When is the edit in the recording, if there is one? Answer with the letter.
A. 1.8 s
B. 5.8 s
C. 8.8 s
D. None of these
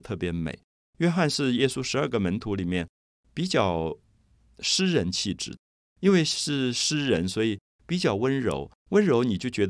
D